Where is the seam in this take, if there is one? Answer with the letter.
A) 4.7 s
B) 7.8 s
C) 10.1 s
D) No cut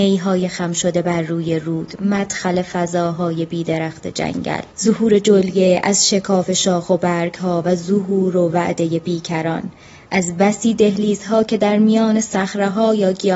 A